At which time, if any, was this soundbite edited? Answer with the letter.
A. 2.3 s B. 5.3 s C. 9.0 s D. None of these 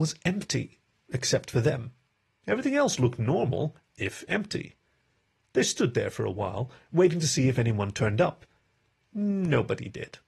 A